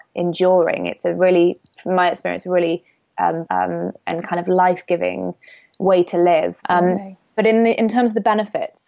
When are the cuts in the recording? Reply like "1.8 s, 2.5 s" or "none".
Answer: 3.5 s, 6.6 s